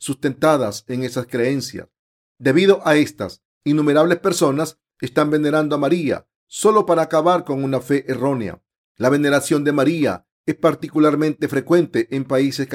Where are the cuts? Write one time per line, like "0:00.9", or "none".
none